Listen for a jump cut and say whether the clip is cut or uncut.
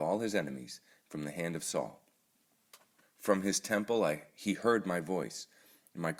cut